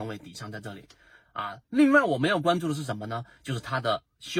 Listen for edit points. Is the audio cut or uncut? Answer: uncut